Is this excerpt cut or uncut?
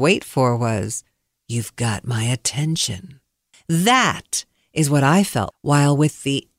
cut